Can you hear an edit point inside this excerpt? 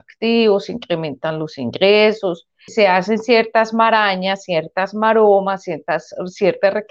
yes; 1 cut; at 2.7 s

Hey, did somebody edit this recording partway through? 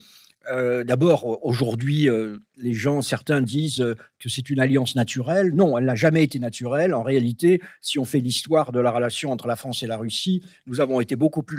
no; 0 cuts

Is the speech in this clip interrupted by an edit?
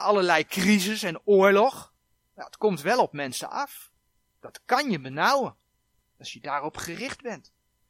no; 0 cuts

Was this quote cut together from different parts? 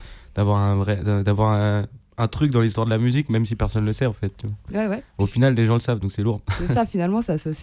no; 0 cuts

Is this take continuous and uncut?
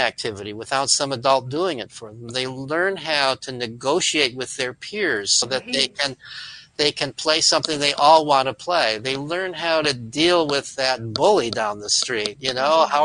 no; 1 cut; at 5.4 s

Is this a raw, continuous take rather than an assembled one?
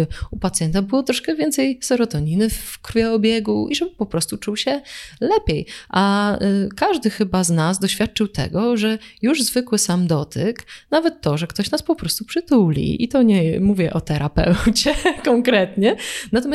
yes; 0 cuts

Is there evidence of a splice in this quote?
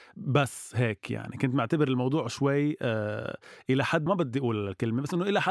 yes; 1 cut; at 4.1 s

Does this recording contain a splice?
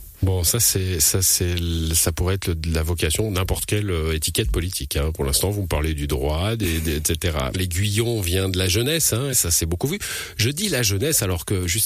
yes; 2 cuts; at 7.5 s, 9.3 s

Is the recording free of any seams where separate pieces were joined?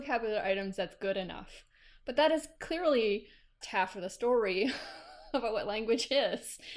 no; 1 cut; at 3.6 s

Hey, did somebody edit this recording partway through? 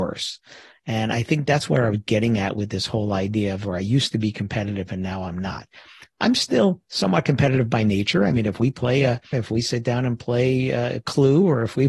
yes; 1 cut; at 9.3 s

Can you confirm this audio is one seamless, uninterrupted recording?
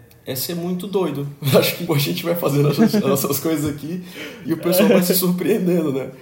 no; 1 cut; at 1.9 s

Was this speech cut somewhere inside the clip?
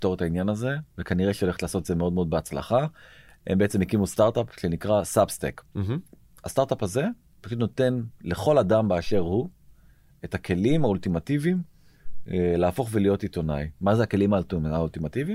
no; 0 cuts

